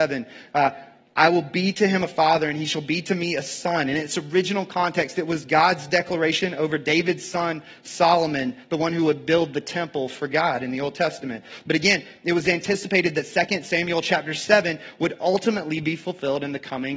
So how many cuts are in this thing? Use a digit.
0